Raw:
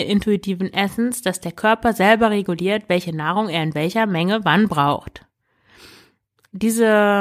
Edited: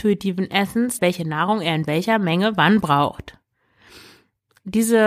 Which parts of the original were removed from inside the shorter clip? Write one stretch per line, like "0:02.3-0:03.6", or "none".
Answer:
0:01.2-0:02.9